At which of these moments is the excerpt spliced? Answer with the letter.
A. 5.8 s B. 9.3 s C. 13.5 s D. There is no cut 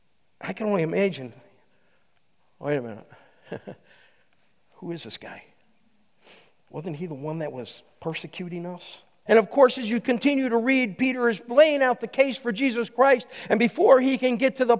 B